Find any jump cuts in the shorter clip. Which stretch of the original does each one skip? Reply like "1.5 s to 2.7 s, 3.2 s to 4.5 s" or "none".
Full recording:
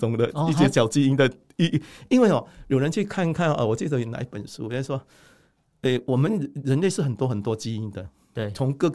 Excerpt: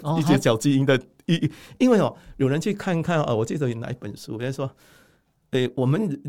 none